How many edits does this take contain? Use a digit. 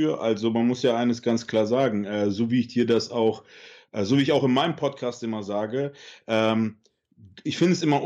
0